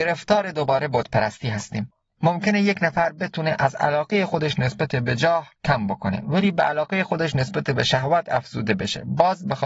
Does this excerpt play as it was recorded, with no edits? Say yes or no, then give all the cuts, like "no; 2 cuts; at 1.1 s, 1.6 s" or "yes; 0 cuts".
no; 1 cut; at 5.6 s